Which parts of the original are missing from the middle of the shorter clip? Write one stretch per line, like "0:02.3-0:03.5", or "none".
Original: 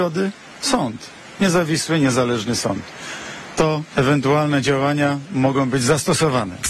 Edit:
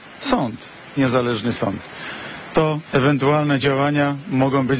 0:01.4-0:02.0

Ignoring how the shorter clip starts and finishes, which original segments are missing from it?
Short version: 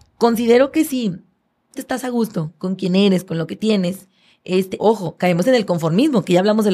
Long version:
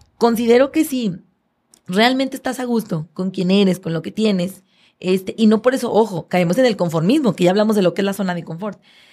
0:01.7-0:02.3
0:05.3-0:05.9

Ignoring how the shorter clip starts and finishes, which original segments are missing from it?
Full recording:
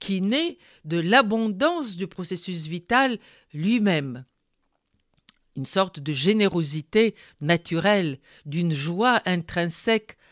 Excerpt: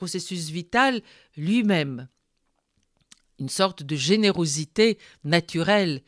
none

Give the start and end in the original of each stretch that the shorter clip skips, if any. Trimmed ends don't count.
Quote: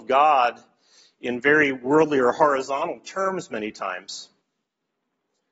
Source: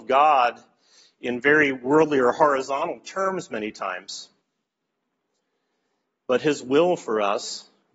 none

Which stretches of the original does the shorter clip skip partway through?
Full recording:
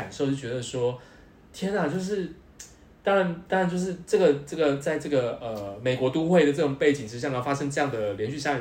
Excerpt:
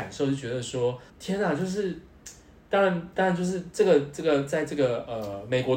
0:01.1-0:01.4

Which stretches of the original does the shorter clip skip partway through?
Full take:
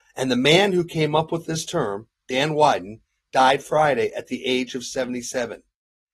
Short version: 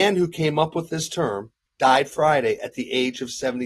0:02.2-0:03.2

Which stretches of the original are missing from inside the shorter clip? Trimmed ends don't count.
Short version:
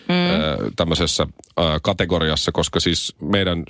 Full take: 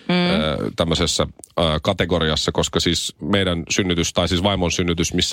none

